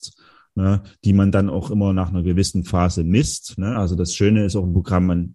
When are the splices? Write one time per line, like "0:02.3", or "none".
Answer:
none